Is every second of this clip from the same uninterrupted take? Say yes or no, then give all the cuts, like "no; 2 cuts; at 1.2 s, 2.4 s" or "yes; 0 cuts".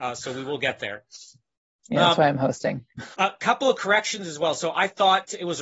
no; 1 cut; at 3.1 s